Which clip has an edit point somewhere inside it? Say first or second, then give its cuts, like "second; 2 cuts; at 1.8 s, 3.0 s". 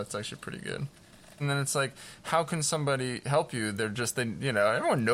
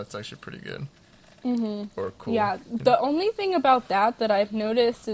first; 1 cut; at 1.4 s